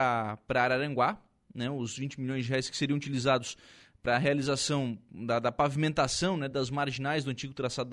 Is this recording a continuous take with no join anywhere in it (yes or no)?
yes